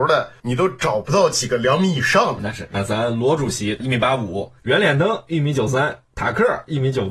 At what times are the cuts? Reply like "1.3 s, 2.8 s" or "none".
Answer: 2.7 s, 4.6 s